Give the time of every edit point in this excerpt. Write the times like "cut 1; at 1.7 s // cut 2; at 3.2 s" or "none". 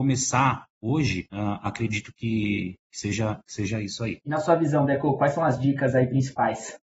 cut 1; at 4.2 s